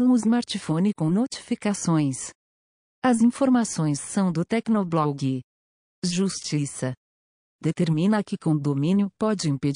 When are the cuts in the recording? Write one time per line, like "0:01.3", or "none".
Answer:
0:02.8